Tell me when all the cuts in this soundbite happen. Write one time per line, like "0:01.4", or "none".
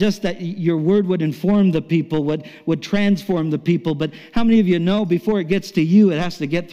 none